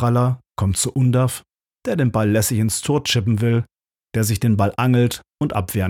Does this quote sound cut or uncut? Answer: cut